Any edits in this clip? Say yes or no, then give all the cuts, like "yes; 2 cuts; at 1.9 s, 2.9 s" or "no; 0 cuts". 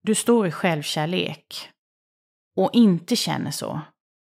no; 0 cuts